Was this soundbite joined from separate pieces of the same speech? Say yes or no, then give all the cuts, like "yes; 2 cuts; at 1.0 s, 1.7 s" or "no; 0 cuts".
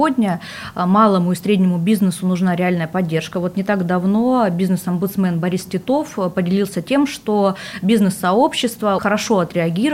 yes; 1 cut; at 9.0 s